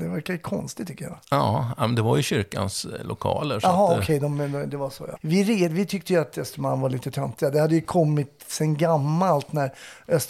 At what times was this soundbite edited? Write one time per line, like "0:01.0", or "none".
0:05.2